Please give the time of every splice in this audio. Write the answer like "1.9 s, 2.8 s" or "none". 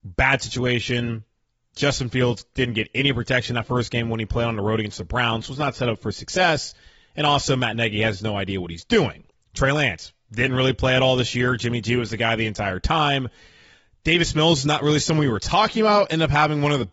none